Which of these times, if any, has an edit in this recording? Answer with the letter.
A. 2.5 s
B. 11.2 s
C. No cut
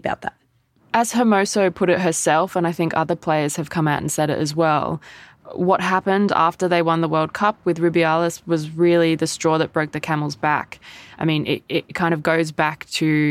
B